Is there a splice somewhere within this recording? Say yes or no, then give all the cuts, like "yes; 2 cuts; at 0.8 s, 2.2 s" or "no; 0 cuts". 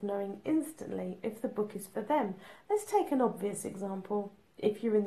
no; 0 cuts